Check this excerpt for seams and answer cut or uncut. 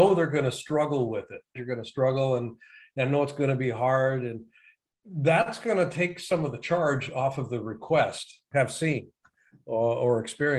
cut